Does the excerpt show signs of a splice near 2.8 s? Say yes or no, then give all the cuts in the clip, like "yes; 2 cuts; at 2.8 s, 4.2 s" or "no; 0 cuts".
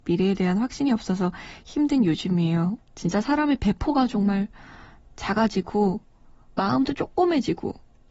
yes; 1 cut; at 2.8 s